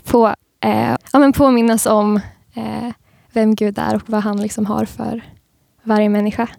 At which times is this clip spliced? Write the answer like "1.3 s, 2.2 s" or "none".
1.0 s